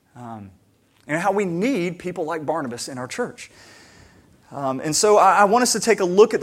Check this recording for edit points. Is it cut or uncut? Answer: uncut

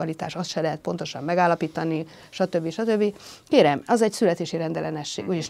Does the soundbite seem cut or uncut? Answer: uncut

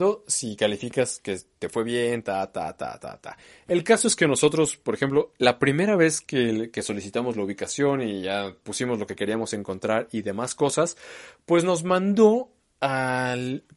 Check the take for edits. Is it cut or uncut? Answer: uncut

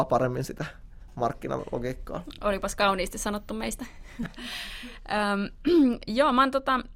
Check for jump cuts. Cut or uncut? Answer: uncut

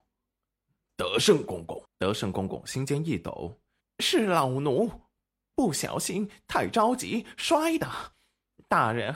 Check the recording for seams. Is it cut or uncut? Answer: cut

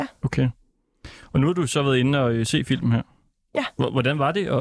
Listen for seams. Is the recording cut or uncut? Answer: uncut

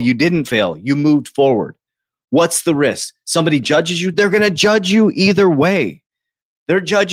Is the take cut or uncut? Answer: uncut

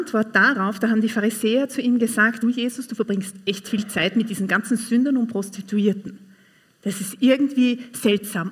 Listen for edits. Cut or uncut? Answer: cut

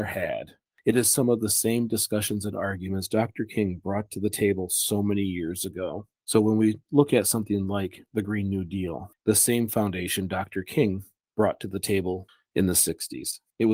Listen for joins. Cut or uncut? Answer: cut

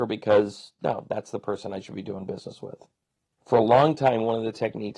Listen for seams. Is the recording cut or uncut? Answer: cut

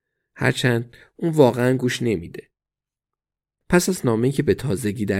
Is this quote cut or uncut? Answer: uncut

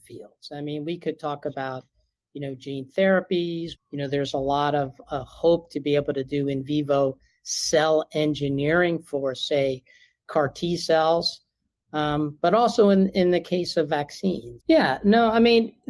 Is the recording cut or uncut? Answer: cut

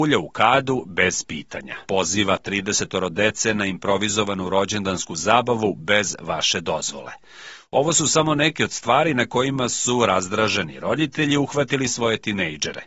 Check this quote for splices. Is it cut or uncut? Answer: cut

